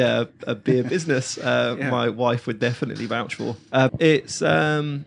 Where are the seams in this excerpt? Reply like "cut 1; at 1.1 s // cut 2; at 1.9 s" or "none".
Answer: cut 1; at 3.9 s